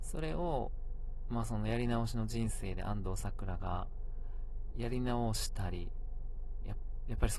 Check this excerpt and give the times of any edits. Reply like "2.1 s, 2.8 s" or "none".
none